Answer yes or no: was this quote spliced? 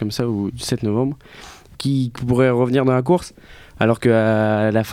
yes